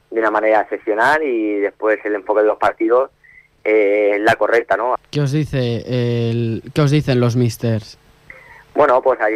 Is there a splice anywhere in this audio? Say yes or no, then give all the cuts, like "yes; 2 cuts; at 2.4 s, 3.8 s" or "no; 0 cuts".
yes; 1 cut; at 5.0 s